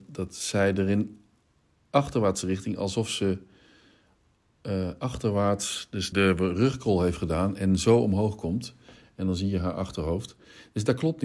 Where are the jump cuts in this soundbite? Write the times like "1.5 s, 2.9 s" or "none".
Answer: 6.1 s